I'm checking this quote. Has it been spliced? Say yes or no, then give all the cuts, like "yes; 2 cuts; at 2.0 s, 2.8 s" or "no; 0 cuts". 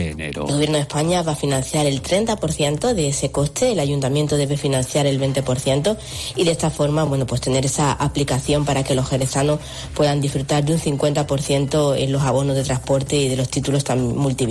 no; 0 cuts